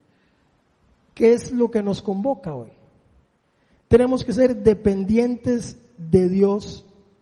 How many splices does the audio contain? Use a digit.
0